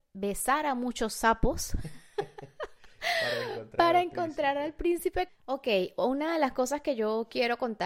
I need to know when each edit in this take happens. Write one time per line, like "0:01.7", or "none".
0:05.3